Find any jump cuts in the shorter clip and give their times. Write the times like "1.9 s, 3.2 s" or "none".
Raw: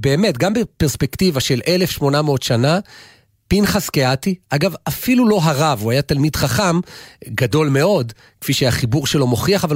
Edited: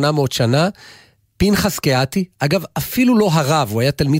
none